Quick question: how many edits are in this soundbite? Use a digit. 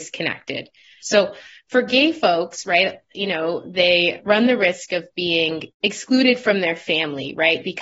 2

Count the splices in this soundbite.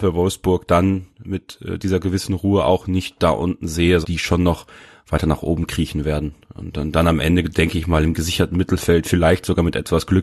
1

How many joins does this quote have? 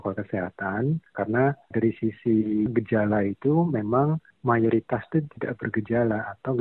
0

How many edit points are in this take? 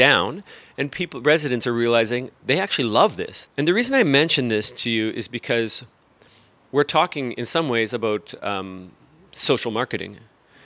1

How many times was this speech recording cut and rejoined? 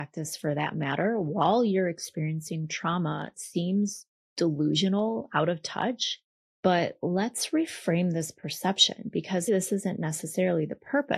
2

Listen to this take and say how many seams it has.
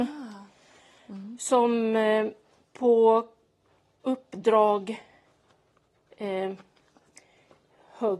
0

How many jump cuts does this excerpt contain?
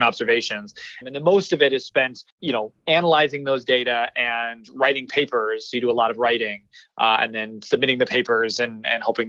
2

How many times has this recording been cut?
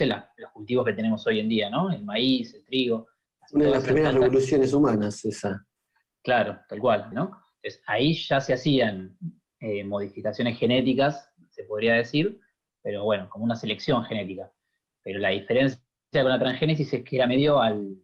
1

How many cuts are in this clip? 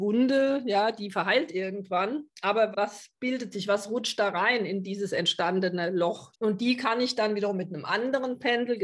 2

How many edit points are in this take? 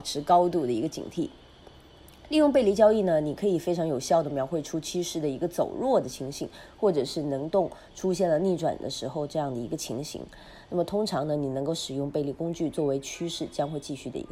0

